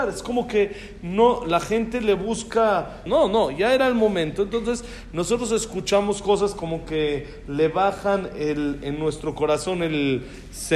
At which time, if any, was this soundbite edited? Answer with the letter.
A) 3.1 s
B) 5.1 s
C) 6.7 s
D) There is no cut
A